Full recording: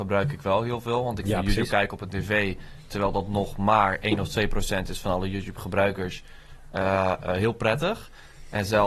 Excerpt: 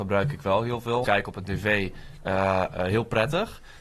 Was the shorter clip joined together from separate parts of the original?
yes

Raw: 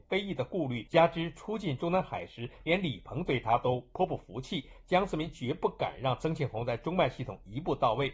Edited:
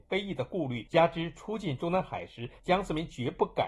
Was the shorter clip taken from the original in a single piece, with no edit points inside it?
no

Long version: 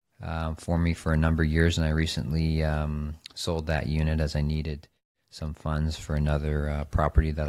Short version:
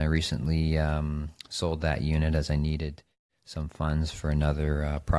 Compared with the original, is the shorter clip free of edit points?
yes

